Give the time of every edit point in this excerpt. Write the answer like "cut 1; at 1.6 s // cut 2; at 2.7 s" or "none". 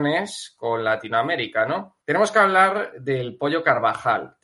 cut 1; at 2.0 s